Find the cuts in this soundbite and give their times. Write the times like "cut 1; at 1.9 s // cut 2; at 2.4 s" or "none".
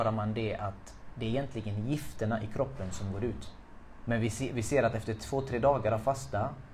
cut 1; at 4.0 s